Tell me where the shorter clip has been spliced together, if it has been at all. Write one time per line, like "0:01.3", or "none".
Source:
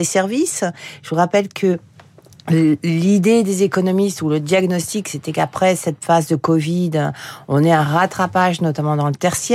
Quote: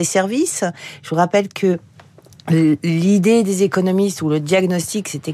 none